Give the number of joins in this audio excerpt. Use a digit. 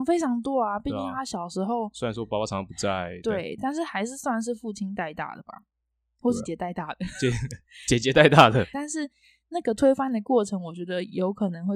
2